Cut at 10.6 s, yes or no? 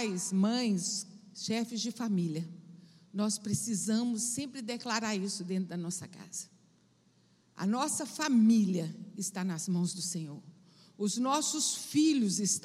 no